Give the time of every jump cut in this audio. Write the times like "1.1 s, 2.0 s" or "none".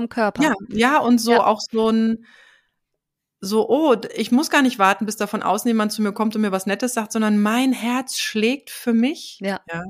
none